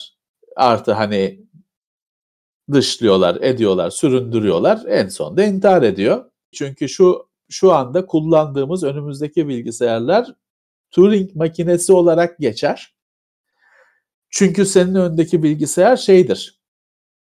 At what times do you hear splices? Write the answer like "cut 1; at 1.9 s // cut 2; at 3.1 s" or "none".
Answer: cut 1; at 6.5 s